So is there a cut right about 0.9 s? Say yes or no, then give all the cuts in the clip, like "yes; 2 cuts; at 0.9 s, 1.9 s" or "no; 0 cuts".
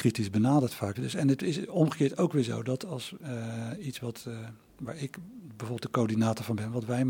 yes; 1 cut; at 0.9 s